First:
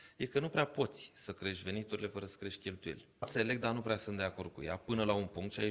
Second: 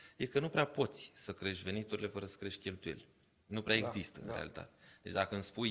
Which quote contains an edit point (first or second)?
first